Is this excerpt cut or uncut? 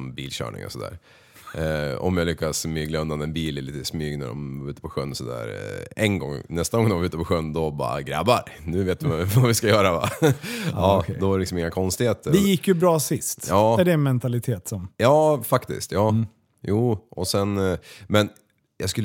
uncut